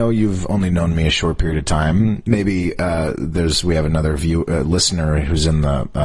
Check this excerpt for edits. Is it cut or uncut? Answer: uncut